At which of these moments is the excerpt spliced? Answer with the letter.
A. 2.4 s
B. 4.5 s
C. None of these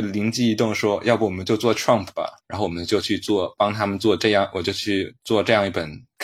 A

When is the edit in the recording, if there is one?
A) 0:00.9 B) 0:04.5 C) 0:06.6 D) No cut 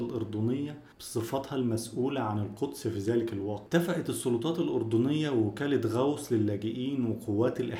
A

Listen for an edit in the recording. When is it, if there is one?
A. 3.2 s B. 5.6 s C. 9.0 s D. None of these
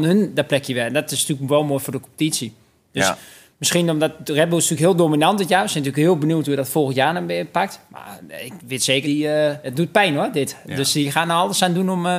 C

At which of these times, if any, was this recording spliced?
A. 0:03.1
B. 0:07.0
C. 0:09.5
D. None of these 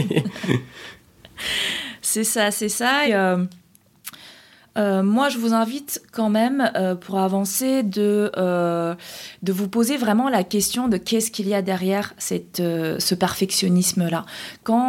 A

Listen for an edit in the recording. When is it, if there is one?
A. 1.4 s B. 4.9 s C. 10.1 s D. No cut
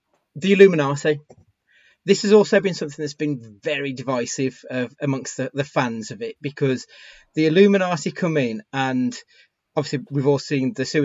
D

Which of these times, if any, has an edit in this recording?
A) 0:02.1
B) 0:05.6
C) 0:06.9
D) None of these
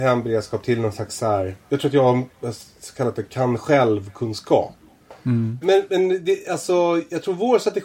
B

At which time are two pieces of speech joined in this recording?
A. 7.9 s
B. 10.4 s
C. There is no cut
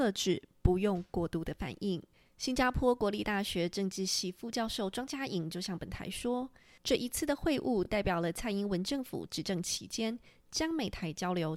C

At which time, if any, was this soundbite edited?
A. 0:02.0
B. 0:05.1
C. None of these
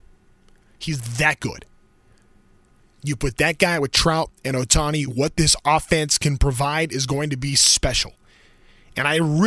B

